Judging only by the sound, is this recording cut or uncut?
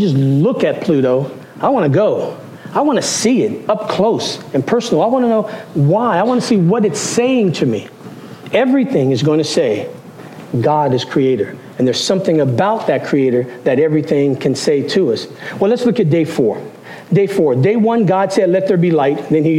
uncut